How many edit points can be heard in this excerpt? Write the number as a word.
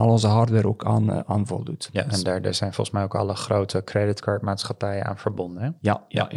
zero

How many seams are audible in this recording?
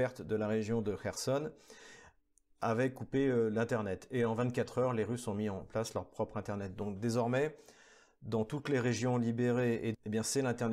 zero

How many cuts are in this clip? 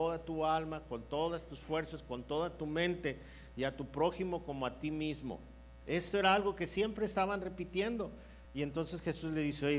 zero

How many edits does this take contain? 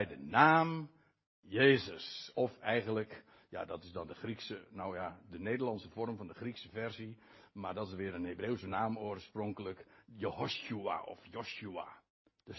zero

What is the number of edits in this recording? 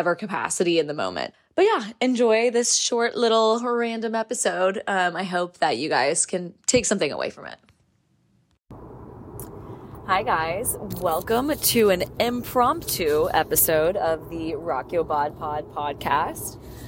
one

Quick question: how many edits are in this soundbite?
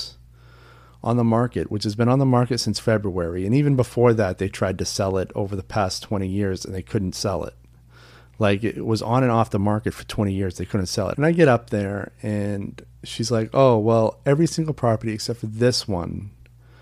two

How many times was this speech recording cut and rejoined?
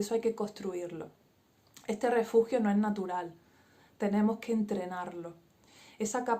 zero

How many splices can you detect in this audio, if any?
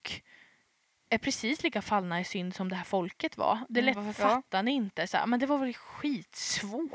one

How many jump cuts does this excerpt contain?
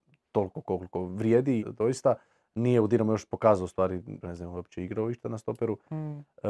two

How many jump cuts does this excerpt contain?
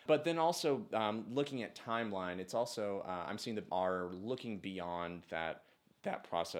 one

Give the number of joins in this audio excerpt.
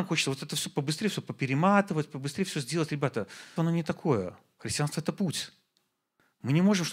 one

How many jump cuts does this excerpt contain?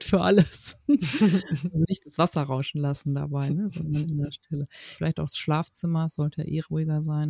one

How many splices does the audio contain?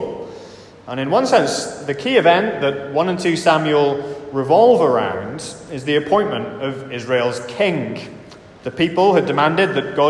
zero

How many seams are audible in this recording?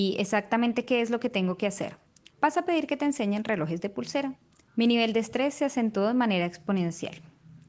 two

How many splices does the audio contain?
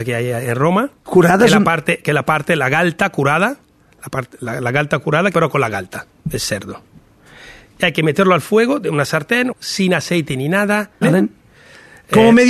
three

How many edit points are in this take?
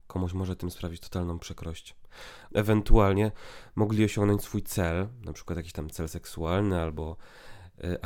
one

